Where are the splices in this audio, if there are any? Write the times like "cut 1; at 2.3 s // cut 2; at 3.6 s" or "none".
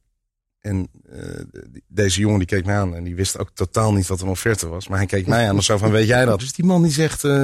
cut 1; at 6.4 s